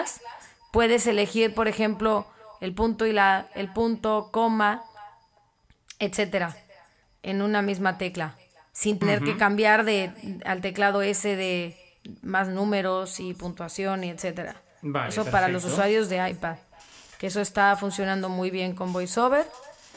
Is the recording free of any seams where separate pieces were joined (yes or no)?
yes